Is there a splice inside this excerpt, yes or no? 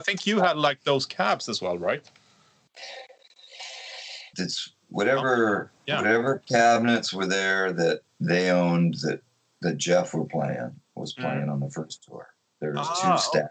yes